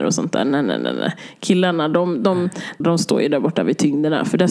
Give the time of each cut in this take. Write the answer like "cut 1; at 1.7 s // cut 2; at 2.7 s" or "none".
cut 1; at 2.8 s